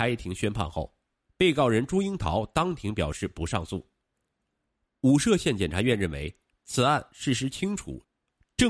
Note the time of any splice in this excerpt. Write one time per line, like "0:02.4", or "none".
none